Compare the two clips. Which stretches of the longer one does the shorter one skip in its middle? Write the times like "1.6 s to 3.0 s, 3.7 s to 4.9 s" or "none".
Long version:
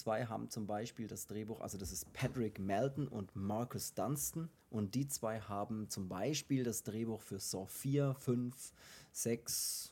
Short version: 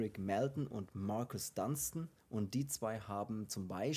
none